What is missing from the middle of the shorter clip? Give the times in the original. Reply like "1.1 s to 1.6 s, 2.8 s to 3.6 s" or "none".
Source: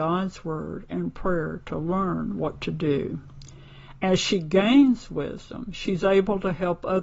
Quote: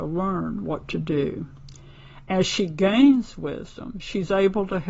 none